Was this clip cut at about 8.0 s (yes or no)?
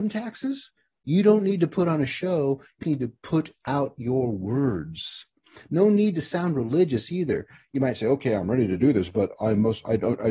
no